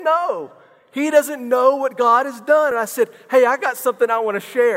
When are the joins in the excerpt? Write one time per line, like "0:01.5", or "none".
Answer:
none